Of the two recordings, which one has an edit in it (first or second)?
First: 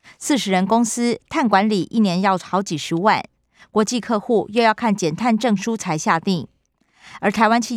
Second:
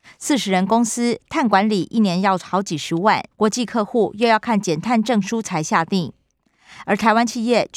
second